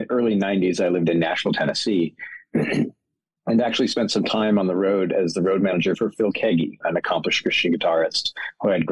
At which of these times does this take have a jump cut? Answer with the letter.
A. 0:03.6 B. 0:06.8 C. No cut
B